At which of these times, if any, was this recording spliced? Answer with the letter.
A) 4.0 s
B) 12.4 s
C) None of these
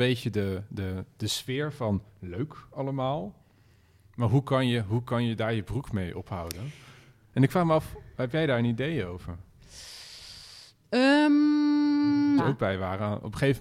B